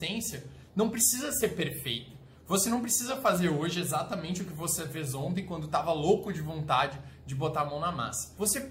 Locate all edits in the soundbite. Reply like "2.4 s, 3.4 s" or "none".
none